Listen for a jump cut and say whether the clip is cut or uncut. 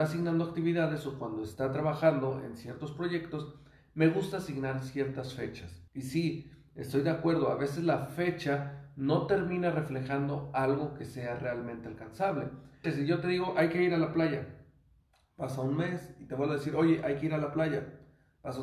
cut